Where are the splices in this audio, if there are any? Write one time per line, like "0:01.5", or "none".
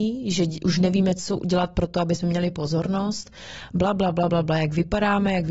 none